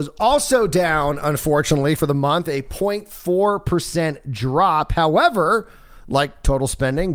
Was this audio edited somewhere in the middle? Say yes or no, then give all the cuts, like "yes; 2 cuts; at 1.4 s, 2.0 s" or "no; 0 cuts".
no; 0 cuts